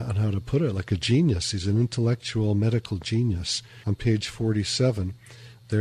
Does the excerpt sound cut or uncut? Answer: cut